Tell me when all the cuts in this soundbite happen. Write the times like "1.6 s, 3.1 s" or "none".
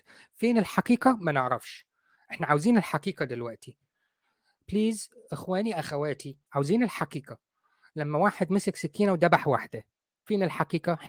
4.7 s, 6.5 s